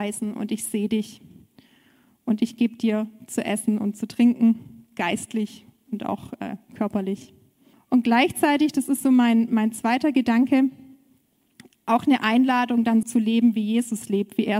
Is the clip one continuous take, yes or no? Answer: no